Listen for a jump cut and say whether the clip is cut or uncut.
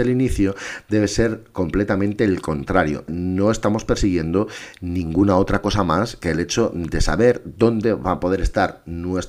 cut